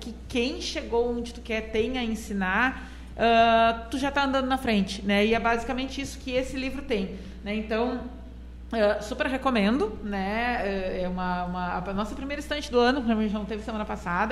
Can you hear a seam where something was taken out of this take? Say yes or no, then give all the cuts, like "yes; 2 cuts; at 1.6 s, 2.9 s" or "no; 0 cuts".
no; 0 cuts